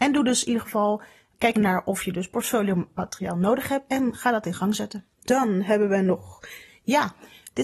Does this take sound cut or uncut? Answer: cut